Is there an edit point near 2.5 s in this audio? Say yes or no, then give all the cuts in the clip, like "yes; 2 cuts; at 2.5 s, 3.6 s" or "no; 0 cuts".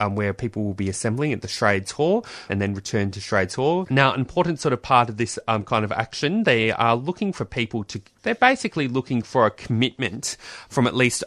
yes; 2 cuts; at 2.5 s, 3.9 s